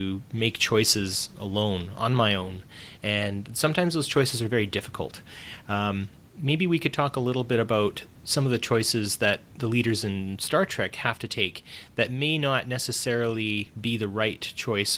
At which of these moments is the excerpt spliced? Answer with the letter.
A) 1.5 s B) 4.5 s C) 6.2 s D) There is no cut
D